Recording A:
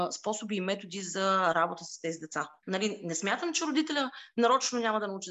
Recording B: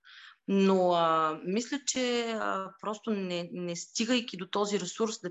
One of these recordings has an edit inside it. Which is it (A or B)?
A